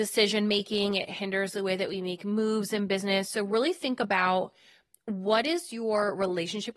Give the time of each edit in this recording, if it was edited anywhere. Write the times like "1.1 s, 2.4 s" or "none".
none